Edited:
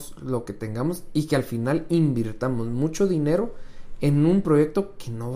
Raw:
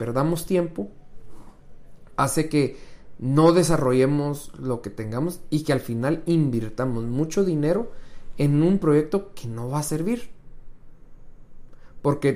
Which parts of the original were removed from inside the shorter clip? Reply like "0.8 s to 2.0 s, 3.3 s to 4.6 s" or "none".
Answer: none